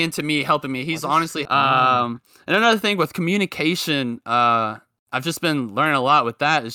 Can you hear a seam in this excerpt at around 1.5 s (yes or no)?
yes